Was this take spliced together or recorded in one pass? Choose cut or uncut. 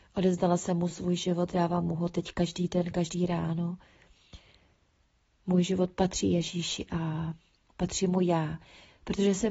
uncut